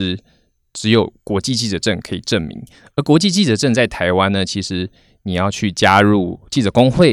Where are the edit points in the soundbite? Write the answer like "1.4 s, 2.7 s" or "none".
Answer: none